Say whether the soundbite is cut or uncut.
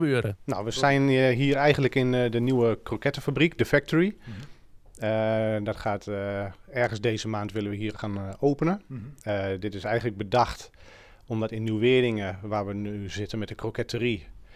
uncut